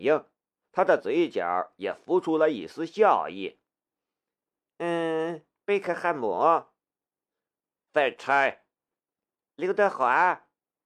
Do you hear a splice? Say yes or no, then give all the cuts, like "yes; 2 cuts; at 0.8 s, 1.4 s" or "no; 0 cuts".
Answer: no; 0 cuts